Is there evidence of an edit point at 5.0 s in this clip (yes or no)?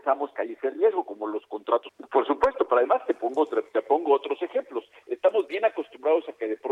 no